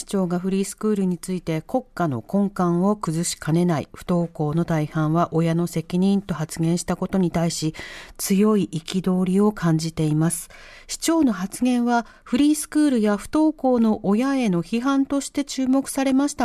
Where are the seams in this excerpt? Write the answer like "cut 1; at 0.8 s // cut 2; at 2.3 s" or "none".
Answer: none